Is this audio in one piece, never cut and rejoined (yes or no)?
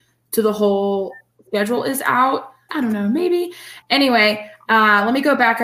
no